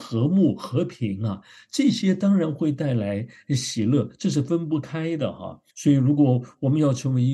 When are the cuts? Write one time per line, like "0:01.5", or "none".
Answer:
0:05.7